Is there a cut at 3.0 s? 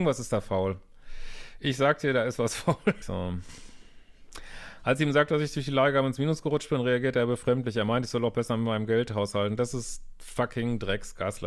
yes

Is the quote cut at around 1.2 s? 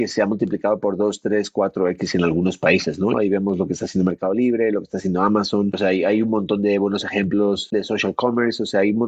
no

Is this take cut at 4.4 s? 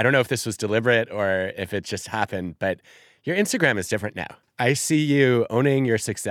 yes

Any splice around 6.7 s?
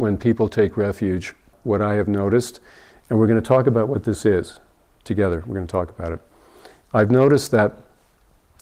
no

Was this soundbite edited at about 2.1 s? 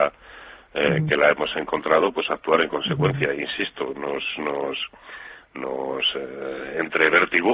no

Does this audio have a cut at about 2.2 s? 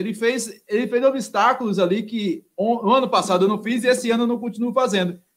no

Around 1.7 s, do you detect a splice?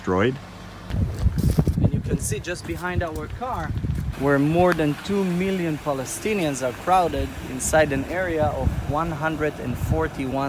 yes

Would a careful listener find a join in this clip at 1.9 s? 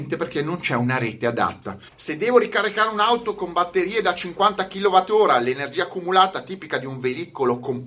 yes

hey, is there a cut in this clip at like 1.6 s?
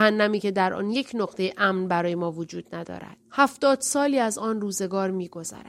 no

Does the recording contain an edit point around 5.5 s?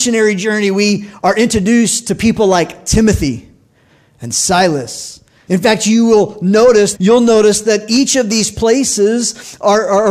yes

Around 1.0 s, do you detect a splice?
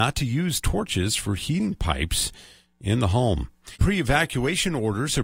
no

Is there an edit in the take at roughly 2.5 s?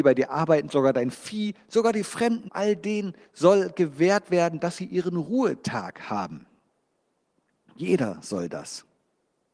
yes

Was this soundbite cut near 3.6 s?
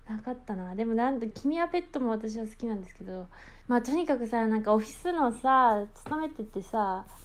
yes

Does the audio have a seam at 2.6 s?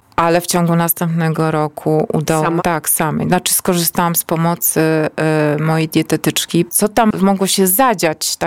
yes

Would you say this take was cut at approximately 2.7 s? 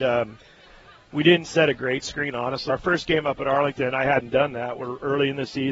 yes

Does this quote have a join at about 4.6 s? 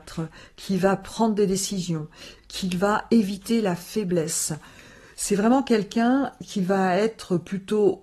no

